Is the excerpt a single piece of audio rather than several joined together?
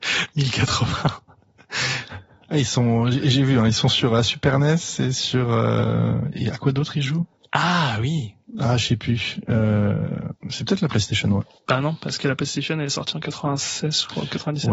yes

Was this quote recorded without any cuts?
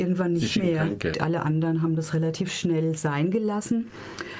no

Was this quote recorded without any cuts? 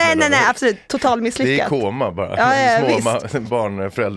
yes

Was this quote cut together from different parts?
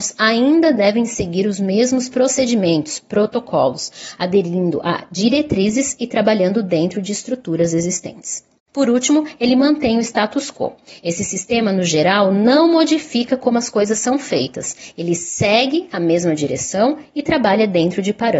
no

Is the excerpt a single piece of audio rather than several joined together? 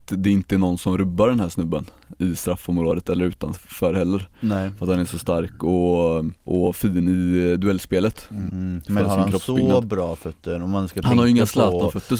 no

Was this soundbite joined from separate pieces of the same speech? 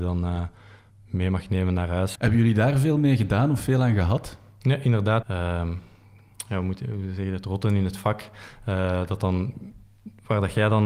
yes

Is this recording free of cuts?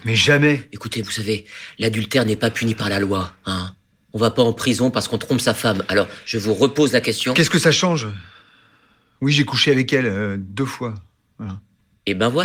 no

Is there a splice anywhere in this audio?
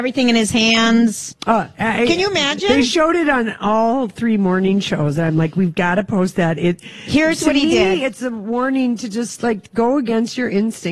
no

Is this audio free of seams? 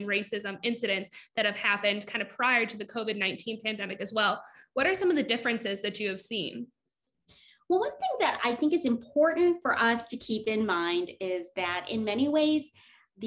yes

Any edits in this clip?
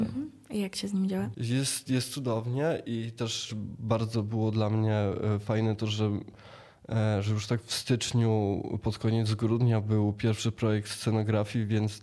no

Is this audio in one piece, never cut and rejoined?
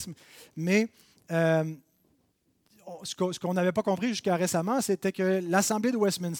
yes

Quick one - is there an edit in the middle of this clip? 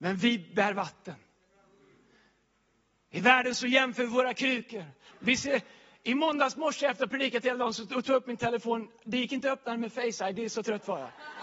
yes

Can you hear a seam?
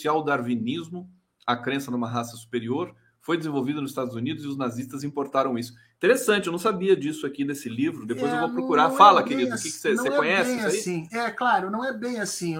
no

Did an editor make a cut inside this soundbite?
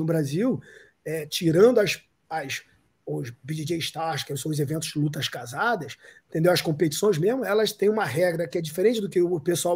no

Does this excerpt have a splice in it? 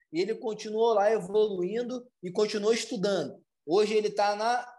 yes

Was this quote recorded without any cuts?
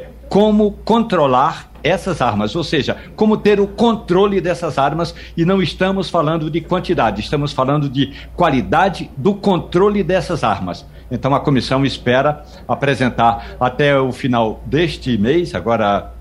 yes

